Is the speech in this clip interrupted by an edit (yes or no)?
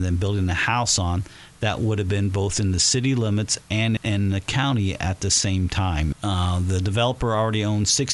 yes